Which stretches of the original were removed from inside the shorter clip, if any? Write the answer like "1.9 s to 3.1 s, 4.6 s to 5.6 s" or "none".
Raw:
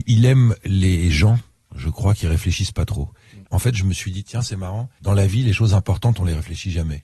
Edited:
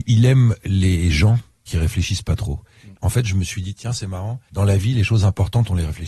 1.7 s to 2.2 s